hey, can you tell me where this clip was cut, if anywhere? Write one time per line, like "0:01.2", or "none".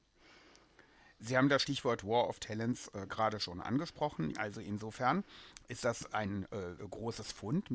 0:04.3
0:06.8